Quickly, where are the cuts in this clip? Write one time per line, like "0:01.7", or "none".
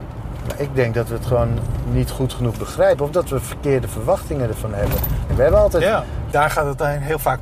0:05.3
0:06.3